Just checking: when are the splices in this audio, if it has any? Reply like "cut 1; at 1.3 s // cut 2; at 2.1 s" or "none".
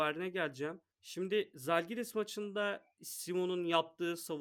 cut 1; at 0.9 s